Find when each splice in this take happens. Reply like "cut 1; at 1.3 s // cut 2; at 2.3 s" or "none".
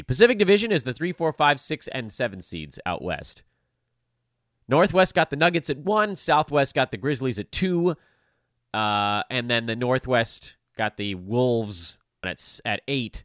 cut 1; at 12.2 s